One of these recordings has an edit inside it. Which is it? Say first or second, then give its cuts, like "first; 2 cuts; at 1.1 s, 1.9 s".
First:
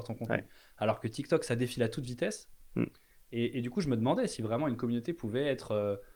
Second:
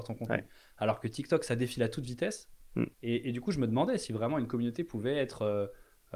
second; 1 cut; at 2.9 s